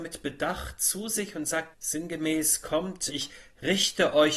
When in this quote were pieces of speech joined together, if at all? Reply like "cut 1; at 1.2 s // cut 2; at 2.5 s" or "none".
cut 1; at 1.7 s // cut 2; at 3.1 s